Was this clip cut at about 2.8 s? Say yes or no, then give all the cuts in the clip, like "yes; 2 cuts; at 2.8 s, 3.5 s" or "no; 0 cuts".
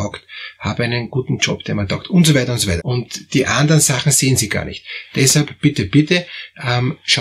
yes; 1 cut; at 2.8 s